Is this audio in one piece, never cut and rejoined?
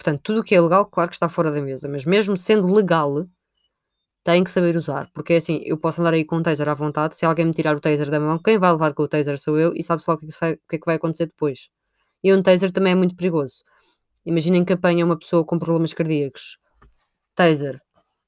yes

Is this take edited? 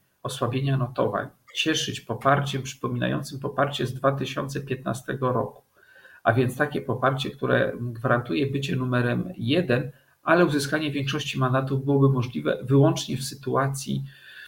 no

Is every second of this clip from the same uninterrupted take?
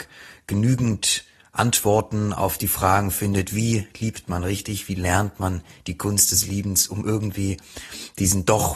yes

